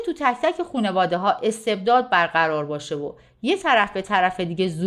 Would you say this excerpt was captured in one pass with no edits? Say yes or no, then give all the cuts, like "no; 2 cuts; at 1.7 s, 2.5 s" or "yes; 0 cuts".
yes; 0 cuts